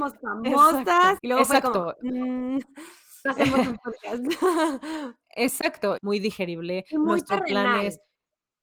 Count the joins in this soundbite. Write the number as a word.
three